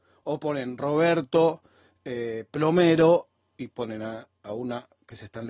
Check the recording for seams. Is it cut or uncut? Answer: uncut